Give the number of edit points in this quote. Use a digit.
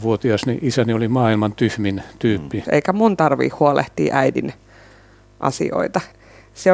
1